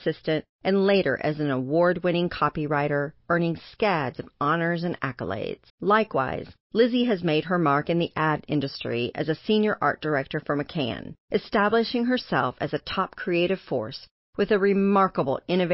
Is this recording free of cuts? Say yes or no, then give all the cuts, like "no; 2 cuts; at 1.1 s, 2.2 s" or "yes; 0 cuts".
no; 1 cut; at 5.7 s